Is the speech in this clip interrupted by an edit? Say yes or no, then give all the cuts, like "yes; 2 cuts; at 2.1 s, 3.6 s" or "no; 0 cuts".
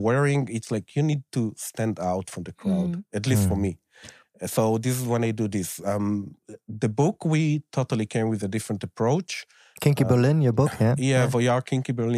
no; 0 cuts